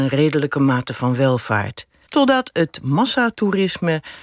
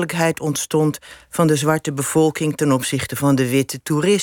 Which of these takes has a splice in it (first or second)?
first